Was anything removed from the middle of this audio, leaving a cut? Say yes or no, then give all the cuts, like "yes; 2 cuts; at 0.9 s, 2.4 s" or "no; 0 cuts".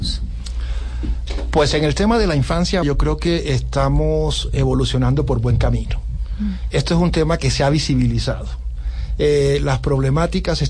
yes; 1 cut; at 2.8 s